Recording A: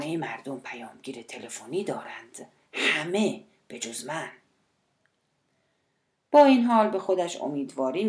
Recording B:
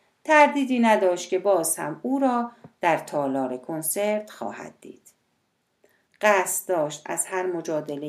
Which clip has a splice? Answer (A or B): B